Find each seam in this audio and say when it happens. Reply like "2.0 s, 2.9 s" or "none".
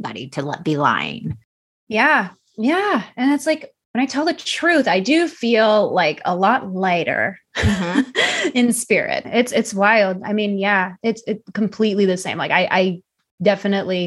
9.2 s